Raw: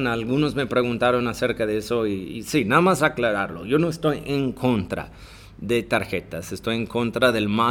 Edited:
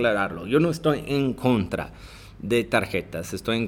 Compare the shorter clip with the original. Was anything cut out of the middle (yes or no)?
no